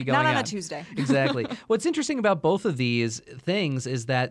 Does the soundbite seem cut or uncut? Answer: uncut